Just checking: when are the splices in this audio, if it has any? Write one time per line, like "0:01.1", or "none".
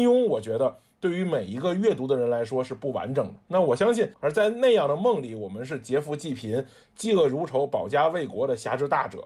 0:04.1